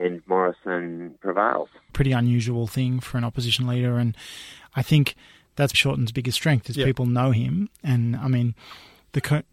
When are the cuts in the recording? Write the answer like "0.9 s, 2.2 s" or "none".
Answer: 1.9 s, 5.7 s